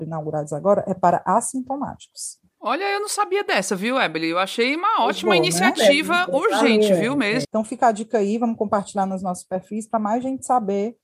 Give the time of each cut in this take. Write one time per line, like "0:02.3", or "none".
0:07.4